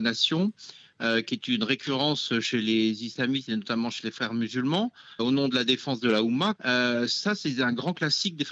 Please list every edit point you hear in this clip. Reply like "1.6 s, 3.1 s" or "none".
5.2 s, 6.6 s